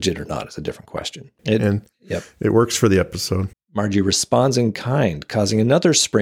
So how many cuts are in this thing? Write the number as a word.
two